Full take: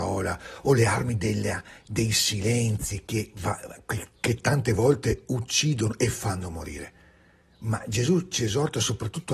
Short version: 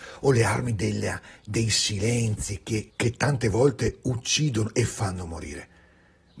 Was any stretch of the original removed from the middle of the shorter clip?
yes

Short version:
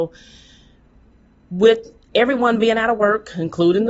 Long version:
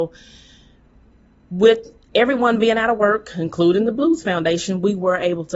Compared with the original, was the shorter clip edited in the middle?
no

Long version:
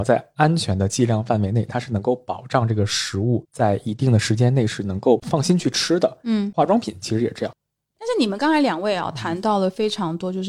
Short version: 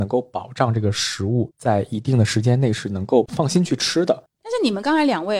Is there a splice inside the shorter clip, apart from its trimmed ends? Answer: yes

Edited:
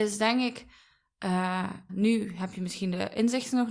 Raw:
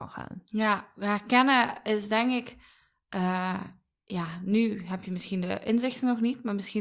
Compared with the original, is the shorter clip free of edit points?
no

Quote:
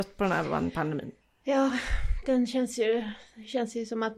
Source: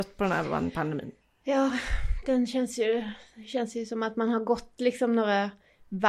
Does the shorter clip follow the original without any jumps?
yes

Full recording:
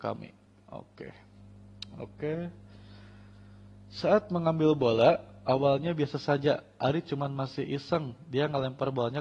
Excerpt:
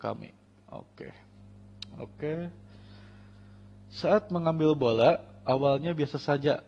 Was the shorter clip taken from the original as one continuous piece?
yes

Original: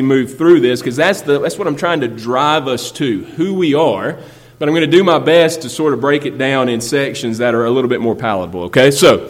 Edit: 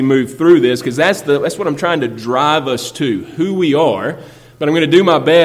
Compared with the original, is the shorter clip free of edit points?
yes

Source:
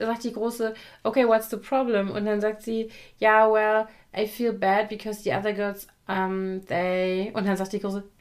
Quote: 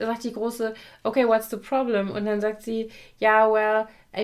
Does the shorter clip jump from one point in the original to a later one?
no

